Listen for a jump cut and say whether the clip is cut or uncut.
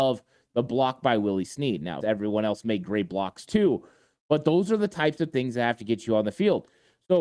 cut